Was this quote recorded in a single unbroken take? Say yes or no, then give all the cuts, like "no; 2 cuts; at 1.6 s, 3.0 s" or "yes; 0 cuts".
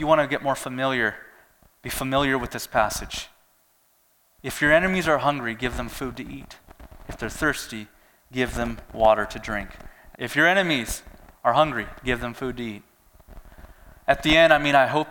no; 2 cuts; at 10.1 s, 14.0 s